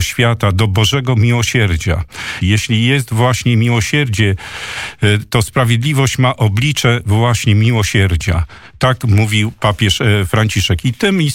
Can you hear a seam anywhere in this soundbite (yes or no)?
yes